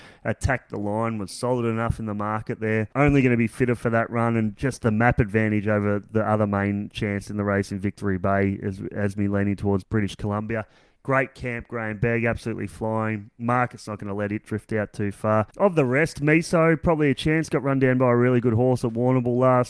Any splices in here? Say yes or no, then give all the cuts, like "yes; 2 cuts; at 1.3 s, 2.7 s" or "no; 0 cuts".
no; 0 cuts